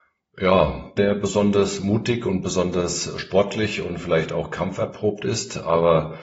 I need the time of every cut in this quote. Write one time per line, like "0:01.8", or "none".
0:01.0

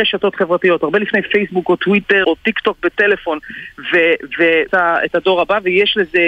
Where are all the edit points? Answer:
0:02.2
0:04.7

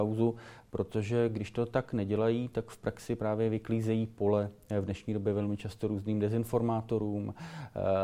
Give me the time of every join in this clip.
none

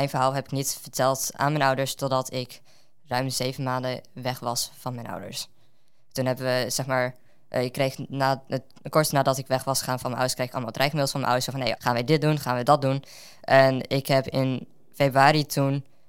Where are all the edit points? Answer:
0:11.8

